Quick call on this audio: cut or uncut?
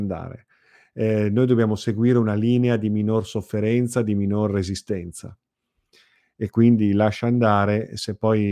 uncut